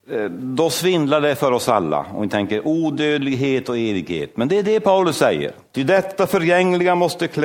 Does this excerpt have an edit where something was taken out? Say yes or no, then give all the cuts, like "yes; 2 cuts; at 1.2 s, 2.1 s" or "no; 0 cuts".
yes; 1 cut; at 5.7 s